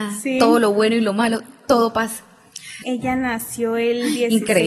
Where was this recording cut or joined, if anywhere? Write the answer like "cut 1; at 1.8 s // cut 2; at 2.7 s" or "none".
cut 1; at 2.8 s

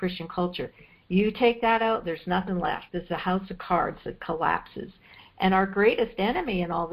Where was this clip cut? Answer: none

